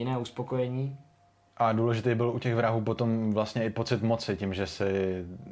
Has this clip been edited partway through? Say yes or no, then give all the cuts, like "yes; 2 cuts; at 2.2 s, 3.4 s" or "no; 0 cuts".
no; 0 cuts